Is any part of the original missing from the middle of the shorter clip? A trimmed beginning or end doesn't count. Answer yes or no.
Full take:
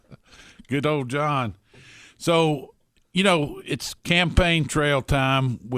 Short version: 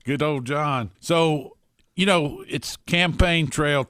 yes